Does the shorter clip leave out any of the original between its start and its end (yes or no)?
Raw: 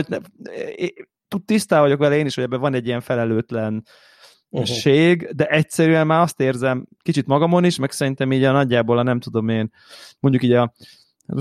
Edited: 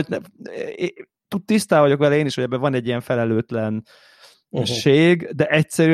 no